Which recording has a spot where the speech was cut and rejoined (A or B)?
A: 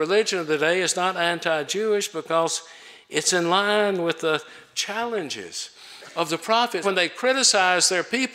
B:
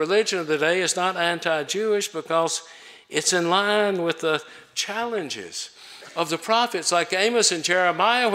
A